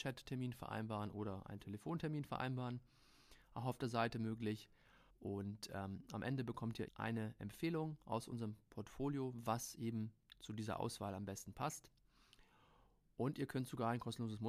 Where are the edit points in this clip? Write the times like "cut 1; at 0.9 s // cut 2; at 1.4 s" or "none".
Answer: cut 1; at 5.1 s // cut 2; at 6.9 s